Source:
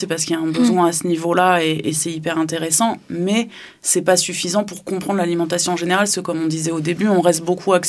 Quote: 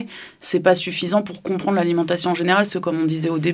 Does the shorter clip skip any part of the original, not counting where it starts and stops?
no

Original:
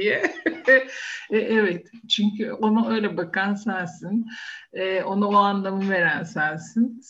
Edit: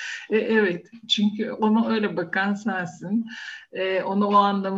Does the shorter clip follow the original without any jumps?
yes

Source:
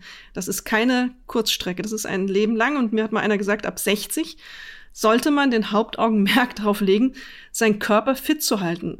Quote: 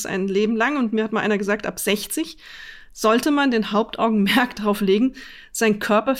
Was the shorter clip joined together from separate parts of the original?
no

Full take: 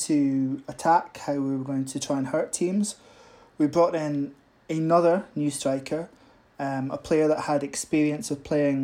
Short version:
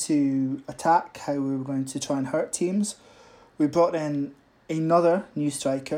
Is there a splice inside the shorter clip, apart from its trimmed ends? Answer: no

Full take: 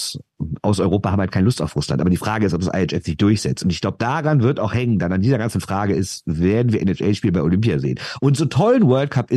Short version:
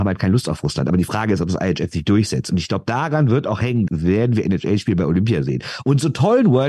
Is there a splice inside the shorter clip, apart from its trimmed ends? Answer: yes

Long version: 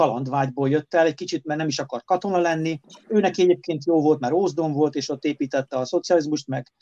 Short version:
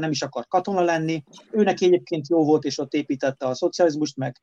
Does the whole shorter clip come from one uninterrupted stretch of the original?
no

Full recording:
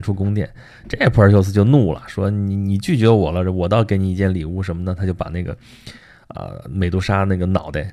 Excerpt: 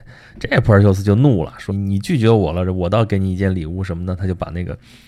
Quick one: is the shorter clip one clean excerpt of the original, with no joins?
no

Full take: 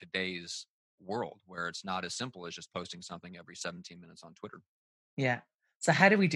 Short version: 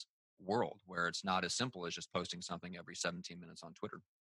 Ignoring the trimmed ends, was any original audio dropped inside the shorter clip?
no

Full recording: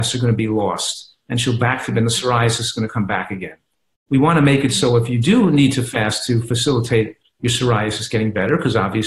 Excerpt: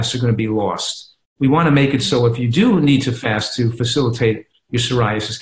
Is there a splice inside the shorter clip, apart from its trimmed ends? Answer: yes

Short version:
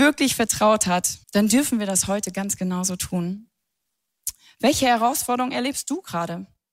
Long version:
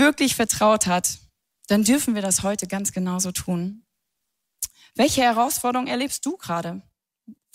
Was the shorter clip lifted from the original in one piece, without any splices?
no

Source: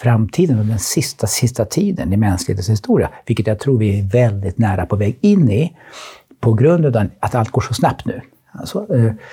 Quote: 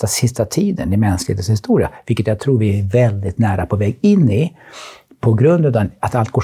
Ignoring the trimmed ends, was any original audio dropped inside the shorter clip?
no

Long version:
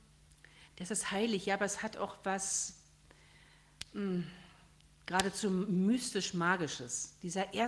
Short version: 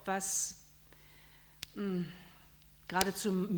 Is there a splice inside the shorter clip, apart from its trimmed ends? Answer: no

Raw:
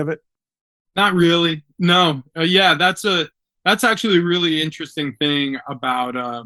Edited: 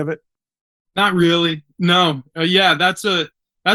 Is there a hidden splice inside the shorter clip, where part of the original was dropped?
no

